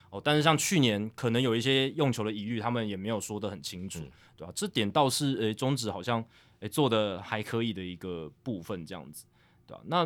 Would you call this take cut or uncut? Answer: uncut